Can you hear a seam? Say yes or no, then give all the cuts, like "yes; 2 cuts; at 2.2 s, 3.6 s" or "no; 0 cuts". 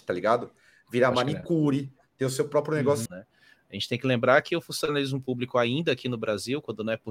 yes; 1 cut; at 3.1 s